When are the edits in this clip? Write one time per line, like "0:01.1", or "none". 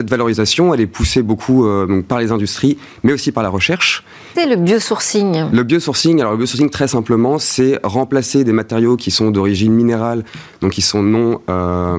0:04.3